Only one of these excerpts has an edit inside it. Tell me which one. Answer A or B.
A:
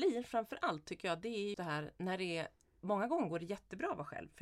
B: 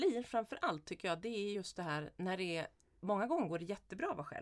A